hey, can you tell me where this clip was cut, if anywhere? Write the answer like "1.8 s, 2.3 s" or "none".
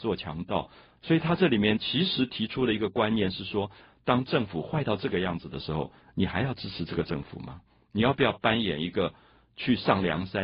1.0 s